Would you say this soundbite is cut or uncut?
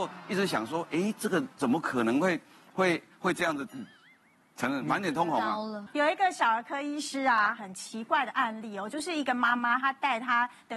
cut